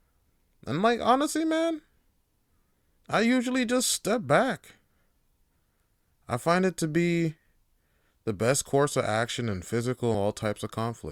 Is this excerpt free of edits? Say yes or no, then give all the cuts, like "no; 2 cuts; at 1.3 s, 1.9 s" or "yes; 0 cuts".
no; 1 cut; at 10.1 s